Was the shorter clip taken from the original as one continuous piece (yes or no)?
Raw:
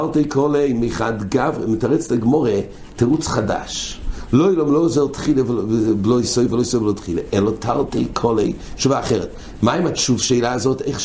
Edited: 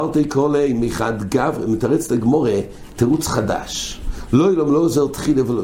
yes